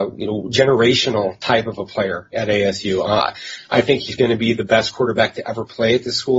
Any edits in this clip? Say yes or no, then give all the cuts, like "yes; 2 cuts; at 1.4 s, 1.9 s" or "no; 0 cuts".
yes; 2 cuts; at 2.3 s, 4.2 s